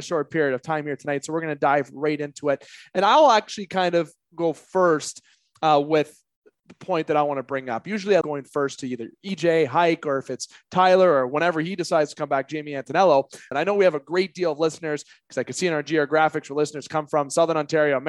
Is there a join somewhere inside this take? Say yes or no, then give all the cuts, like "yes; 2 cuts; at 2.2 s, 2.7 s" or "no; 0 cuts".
yes; 2 cuts; at 8.2 s, 13.5 s